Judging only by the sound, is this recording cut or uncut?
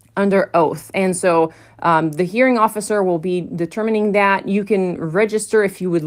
uncut